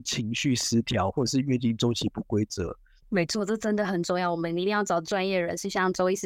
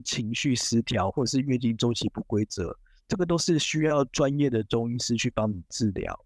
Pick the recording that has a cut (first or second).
first